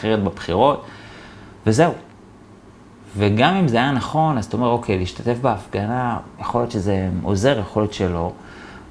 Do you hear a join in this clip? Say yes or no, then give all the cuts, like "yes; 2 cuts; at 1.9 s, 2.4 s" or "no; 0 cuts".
no; 0 cuts